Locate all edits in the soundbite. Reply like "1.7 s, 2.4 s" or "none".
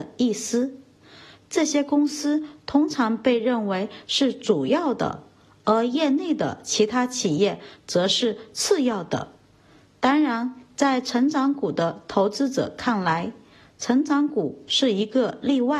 none